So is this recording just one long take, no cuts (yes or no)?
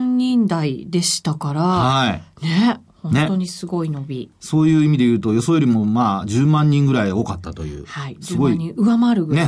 yes